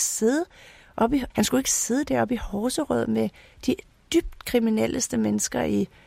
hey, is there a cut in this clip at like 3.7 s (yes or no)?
no